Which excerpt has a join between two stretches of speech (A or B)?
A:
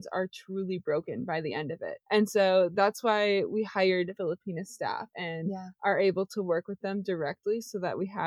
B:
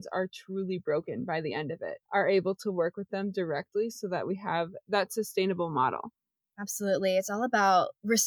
B